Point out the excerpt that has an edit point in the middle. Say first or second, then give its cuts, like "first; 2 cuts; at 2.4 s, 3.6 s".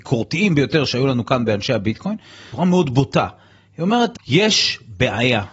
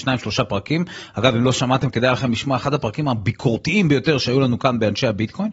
first; 2 cuts; at 2.5 s, 4.1 s